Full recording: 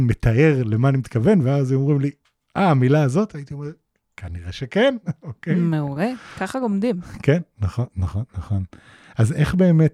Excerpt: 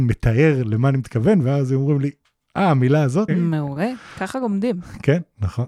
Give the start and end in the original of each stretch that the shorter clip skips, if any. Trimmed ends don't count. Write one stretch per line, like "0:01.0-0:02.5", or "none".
0:03.3-0:05.5